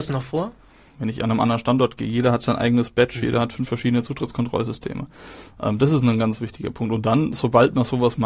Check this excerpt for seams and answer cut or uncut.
cut